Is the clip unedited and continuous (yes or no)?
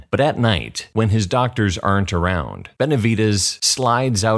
yes